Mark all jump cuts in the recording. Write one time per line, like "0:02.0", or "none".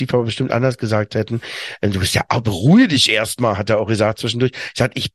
none